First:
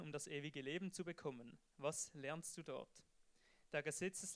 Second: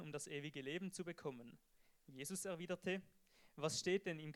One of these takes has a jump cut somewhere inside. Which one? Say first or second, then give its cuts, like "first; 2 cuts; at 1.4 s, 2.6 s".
first; 1 cut; at 1.7 s